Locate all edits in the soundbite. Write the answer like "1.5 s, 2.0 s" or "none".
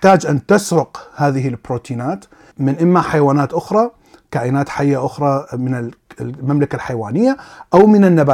2.5 s